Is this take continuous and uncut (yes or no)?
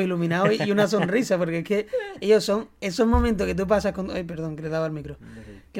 yes